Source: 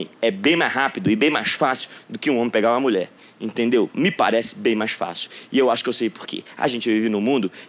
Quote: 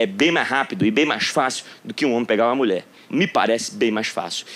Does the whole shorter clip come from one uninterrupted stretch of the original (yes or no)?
no